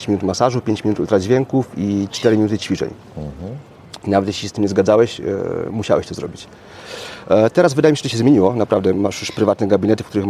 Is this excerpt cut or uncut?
uncut